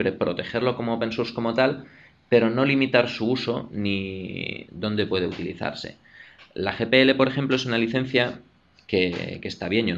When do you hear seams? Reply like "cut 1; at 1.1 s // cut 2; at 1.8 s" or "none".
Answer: cut 1; at 4.7 s